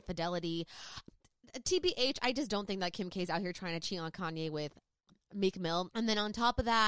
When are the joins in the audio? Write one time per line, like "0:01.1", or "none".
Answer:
0:05.9